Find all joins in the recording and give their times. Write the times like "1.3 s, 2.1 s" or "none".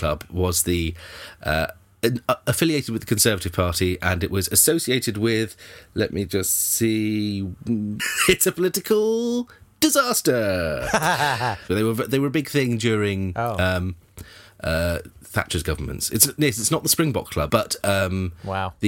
8.0 s, 11.7 s, 17.5 s